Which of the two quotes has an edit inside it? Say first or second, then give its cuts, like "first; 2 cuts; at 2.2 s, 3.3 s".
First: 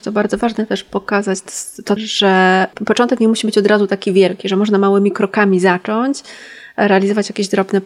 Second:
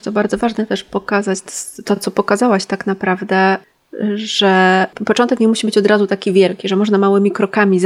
first; 1 cut; at 2.0 s